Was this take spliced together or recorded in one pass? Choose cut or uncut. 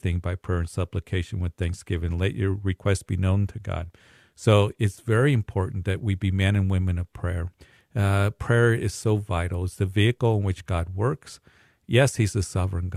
uncut